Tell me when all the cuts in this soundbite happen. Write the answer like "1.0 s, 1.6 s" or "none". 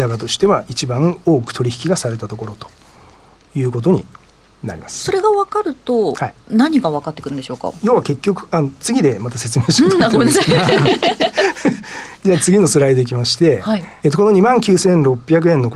14.0 s